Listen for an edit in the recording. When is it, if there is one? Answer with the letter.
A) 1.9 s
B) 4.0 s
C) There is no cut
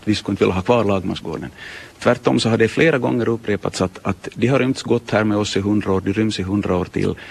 C